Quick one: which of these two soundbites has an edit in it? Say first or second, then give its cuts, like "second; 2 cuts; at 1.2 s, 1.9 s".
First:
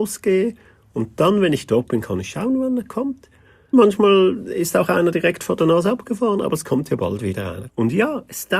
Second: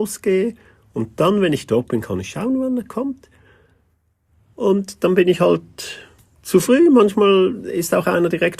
first; 2 cuts; at 3.7 s, 7.7 s